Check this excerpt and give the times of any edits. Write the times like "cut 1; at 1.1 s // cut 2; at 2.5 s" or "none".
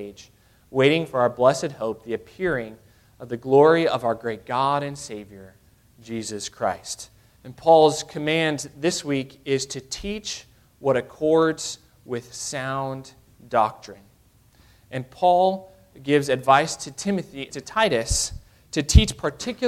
cut 1; at 7.4 s // cut 2; at 17.5 s